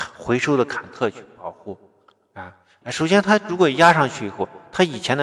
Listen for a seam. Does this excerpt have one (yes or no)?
yes